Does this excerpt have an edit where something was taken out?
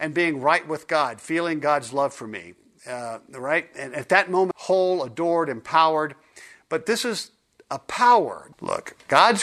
yes; 2 cuts; at 4.5 s, 8.5 s

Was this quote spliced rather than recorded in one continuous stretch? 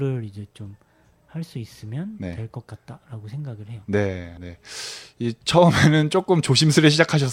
yes; 1 cut; at 4.4 s

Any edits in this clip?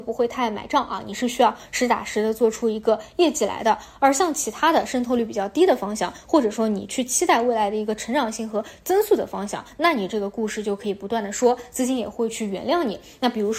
no; 0 cuts

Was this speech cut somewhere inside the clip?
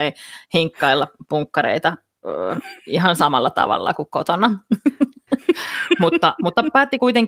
no; 0 cuts

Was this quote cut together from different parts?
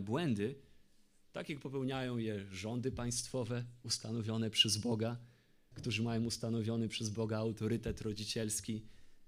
yes; 1 cut; at 5.7 s

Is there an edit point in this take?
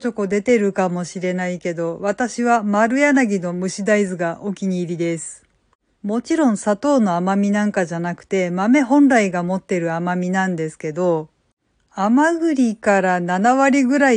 yes; 1 cut; at 6.0 s

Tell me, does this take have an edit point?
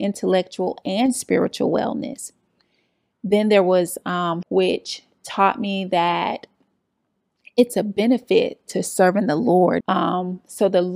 yes; 3 cuts; at 3.1 s, 4.4 s, 9.8 s

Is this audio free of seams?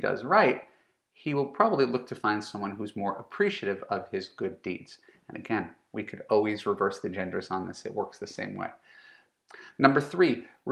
yes; 0 cuts

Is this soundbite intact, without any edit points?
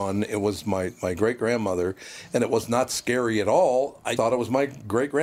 no; 1 cut; at 4.2 s

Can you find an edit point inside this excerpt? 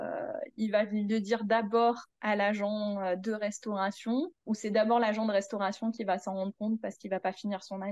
yes; 1 cut; at 4.4 s

